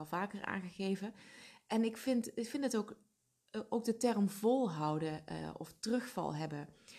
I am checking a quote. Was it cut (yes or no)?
no